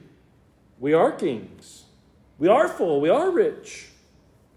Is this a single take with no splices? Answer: yes; 0 cuts

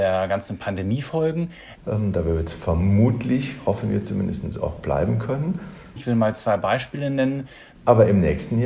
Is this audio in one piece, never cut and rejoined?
no; 3 cuts; at 1.7 s, 6.0 s, 7.7 s

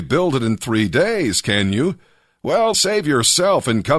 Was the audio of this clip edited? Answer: yes; 1 cut; at 2.7 s

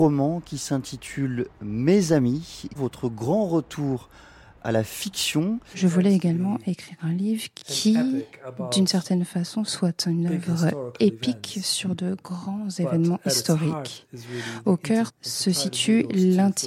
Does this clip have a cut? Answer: yes; 3 cuts; at 2.8 s, 5.7 s, 15.1 s

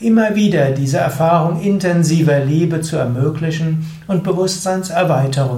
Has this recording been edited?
no; 0 cuts

